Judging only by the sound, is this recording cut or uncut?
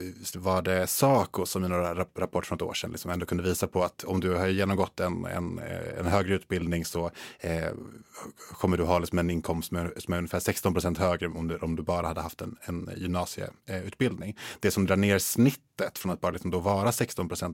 uncut